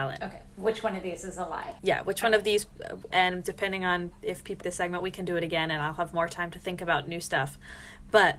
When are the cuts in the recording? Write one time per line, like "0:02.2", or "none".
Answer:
0:01.8
0:03.1
0:04.6